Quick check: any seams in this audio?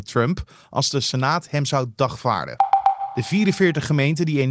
no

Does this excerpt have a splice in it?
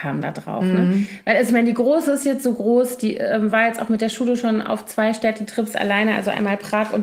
no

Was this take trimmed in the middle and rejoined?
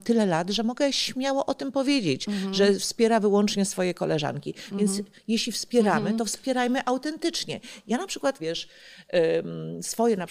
yes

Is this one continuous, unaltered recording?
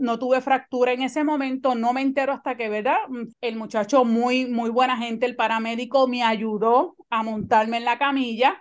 no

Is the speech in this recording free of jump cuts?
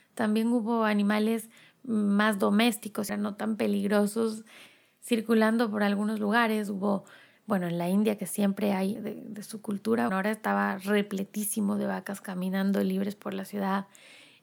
no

